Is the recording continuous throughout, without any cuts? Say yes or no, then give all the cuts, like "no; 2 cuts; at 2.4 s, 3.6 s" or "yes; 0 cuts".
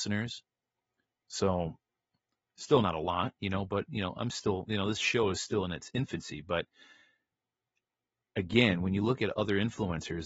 yes; 0 cuts